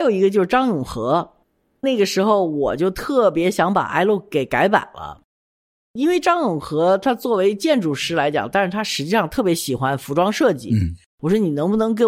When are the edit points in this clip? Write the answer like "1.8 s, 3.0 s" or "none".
none